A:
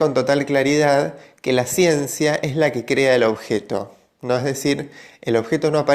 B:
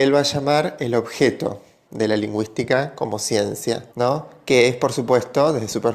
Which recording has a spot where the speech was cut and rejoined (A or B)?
B